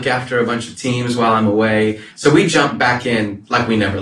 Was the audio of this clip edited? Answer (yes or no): yes